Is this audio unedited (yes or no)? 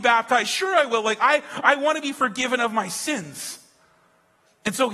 yes